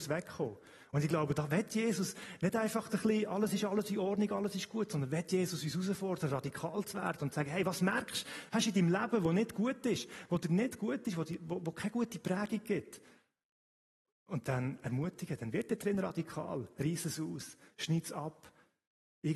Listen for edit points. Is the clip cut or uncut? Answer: uncut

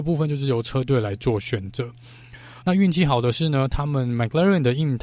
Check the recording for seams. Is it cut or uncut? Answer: cut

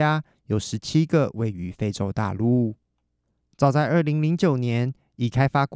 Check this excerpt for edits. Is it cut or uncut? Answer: uncut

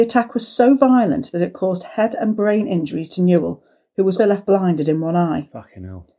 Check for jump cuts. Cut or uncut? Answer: cut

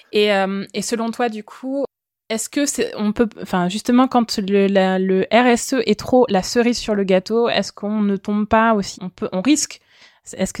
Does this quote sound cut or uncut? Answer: cut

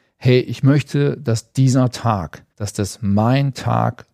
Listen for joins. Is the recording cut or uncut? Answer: cut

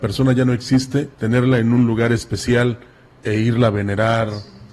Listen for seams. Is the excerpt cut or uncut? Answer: cut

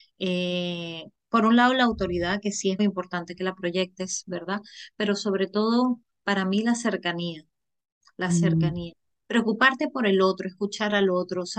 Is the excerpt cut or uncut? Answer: cut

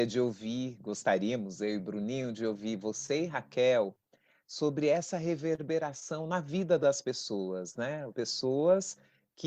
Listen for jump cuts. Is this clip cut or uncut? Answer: cut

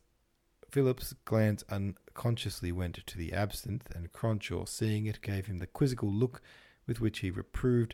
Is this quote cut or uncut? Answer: uncut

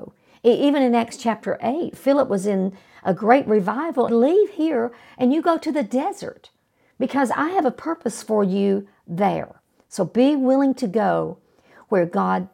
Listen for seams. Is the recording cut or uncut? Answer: cut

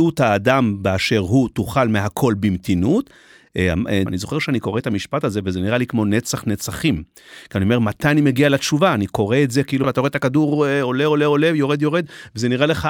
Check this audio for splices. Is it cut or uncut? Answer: cut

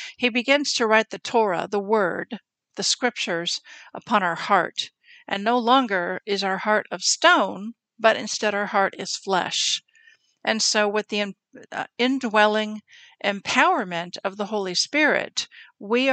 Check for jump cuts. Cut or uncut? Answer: uncut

